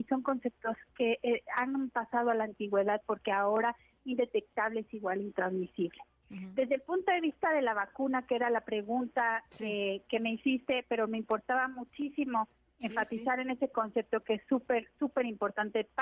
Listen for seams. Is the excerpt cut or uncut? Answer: uncut